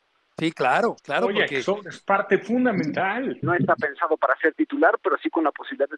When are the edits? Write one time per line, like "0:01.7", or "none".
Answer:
0:01.0
0:03.4